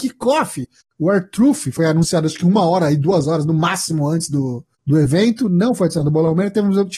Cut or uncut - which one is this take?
uncut